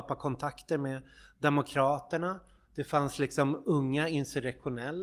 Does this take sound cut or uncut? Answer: uncut